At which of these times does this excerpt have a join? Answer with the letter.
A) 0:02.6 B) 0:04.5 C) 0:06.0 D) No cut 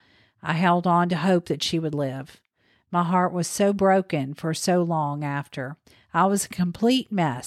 D